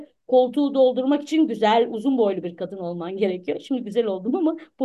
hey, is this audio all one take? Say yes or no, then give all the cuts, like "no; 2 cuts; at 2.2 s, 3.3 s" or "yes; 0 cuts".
yes; 0 cuts